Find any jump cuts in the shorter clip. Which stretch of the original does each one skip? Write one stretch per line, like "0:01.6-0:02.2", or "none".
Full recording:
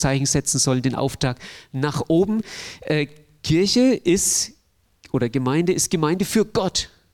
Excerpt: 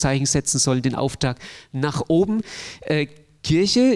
none